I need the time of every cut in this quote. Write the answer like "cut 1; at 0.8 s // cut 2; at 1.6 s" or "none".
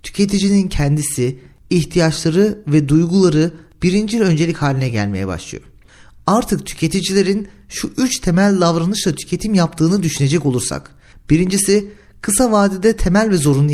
none